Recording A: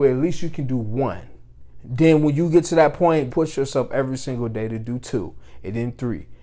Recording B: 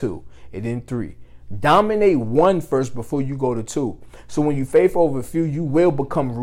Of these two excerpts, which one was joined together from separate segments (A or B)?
A